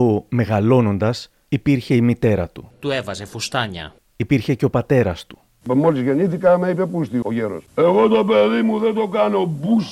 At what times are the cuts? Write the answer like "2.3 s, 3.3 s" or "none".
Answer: 4.0 s, 7.7 s